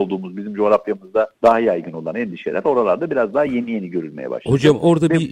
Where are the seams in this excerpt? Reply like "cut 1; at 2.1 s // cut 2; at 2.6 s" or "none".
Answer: none